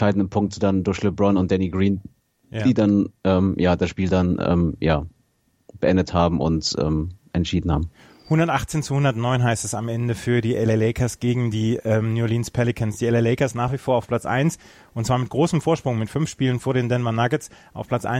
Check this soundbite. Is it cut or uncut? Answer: uncut